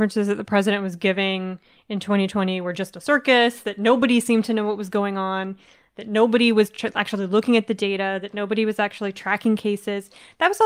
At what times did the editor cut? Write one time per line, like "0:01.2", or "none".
none